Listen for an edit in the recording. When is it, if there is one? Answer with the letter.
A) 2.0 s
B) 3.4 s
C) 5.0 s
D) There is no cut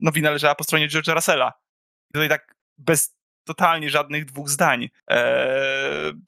C